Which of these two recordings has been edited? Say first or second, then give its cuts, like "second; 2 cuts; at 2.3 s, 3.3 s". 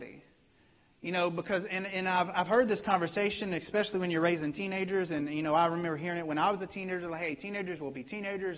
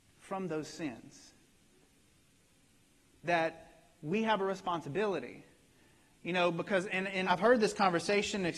second; 2 cuts; at 3.1 s, 7.2 s